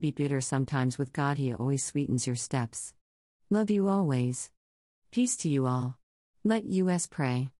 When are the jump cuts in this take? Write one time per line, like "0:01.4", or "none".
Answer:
0:04.9
0:06.3